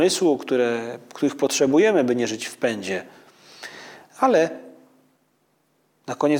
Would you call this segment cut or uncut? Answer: uncut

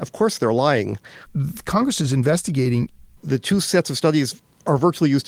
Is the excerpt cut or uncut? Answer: cut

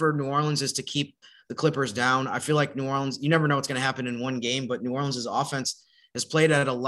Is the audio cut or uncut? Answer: uncut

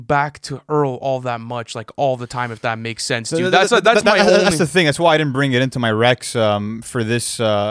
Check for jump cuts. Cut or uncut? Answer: uncut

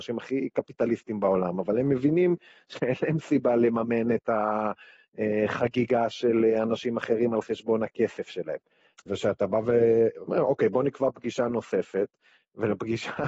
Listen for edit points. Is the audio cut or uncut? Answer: cut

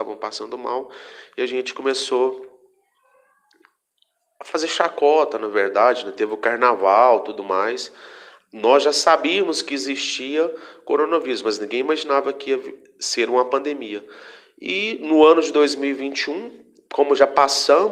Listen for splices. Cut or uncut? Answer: uncut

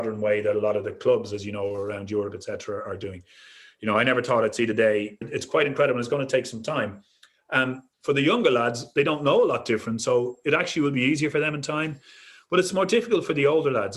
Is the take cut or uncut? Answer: cut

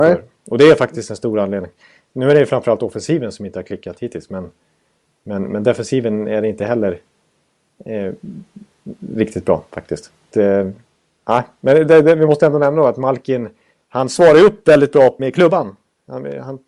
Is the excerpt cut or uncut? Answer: cut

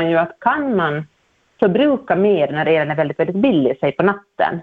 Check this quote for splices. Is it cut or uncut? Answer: uncut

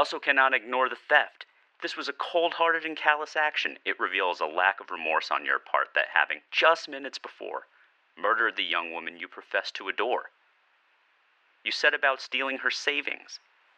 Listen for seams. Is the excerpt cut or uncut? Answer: uncut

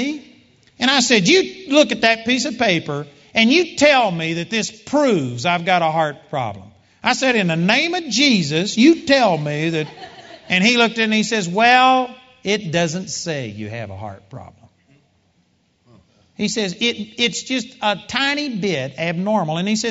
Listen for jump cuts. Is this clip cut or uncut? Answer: uncut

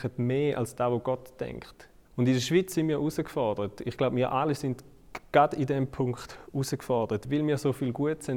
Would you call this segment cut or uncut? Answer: cut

